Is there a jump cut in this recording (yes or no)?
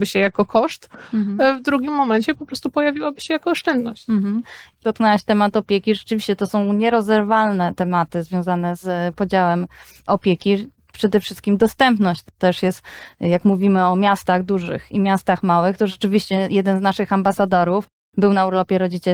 no